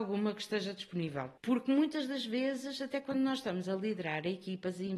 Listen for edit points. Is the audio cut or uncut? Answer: cut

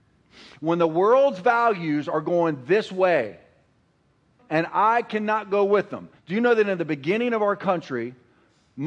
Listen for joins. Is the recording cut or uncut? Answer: cut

